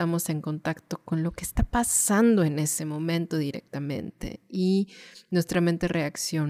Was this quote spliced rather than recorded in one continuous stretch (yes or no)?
no